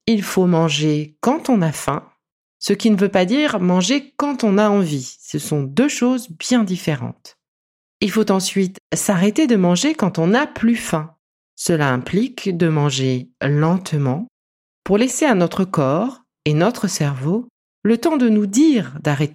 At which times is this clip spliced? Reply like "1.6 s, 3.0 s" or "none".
none